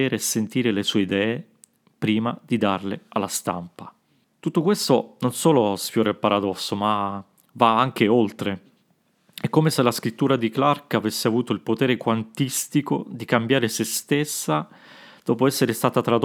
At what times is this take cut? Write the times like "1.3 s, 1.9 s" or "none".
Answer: none